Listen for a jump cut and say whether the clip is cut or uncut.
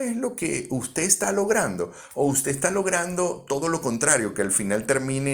uncut